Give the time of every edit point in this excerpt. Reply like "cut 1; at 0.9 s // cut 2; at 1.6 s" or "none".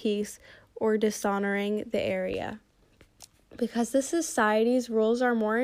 none